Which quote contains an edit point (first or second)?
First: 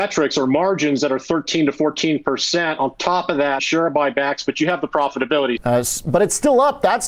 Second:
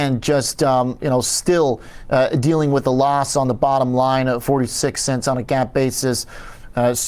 first